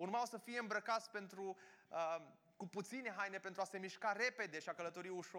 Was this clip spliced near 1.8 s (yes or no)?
no